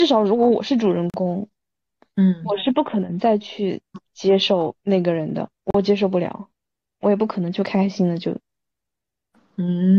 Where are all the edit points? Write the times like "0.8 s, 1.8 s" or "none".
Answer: 4.8 s